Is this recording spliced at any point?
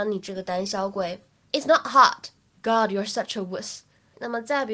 no; 0 cuts

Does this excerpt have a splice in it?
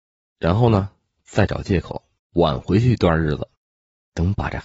yes; 1 cut; at 2.2 s

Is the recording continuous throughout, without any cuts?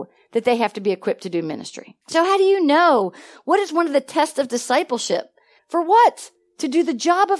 no; 2 cuts; at 2.0 s, 5.6 s

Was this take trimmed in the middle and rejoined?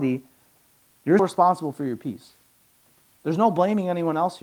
yes; 1 cut; at 1.2 s

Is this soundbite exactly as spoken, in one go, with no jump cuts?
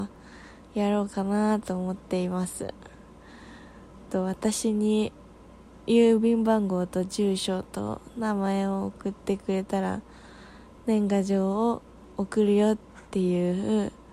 yes; 0 cuts

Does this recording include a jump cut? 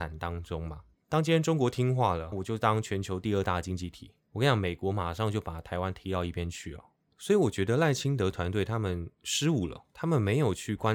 yes; 2 cuts; at 2.3 s, 7.1 s

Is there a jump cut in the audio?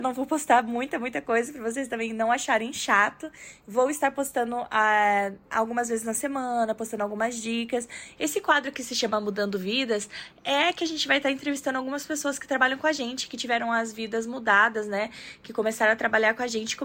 yes; 1 cut; at 8.1 s

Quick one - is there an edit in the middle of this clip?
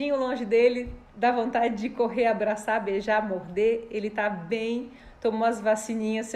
no; 0 cuts

